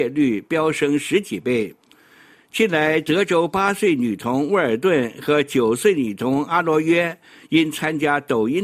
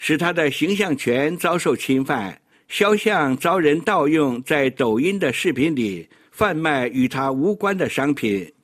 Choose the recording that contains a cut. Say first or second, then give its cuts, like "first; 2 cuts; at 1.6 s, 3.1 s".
second; 1 cut; at 2.5 s